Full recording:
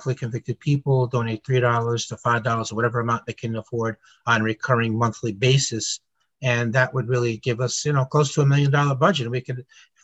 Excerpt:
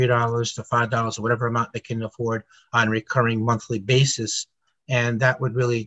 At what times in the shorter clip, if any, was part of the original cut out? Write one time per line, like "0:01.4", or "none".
none